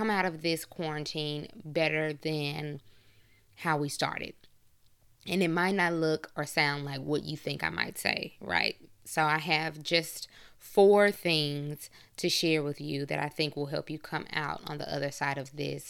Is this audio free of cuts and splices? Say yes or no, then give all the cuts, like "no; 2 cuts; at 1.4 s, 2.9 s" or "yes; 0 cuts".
yes; 0 cuts